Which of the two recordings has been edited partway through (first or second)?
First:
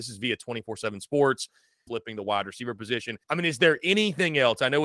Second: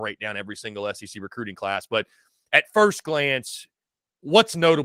first